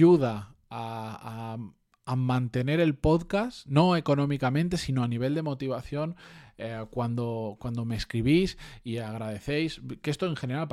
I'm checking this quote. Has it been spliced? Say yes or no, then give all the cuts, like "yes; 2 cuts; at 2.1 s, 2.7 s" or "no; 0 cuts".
no; 0 cuts